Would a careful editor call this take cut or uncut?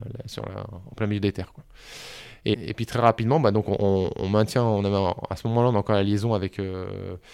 cut